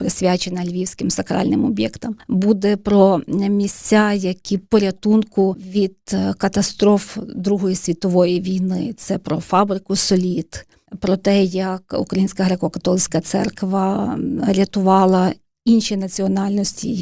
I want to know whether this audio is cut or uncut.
uncut